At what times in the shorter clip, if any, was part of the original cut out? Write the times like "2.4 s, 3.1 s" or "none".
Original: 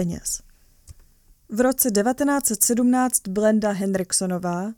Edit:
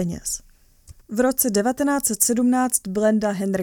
1.0 s